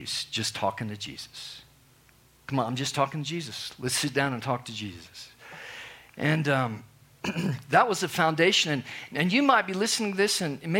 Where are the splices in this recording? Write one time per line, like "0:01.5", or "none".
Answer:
none